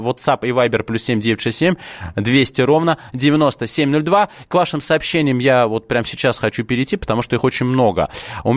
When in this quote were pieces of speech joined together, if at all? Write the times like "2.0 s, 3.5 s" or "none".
none